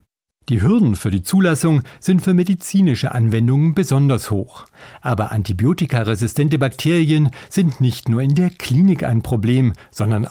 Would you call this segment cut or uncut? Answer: uncut